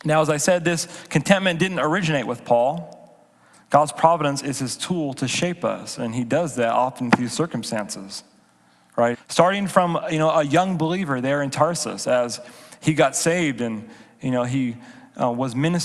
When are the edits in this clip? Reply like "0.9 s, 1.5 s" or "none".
3.5 s, 9.1 s